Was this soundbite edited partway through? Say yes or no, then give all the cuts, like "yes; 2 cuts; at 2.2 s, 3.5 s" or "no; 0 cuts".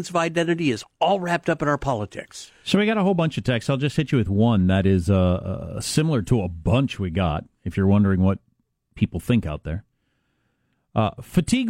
no; 0 cuts